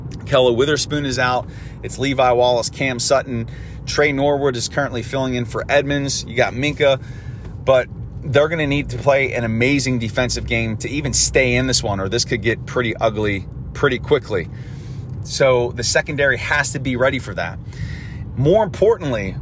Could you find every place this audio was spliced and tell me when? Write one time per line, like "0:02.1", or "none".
0:15.2